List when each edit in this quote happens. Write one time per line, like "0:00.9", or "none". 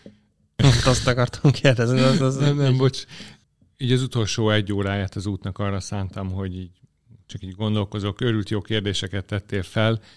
none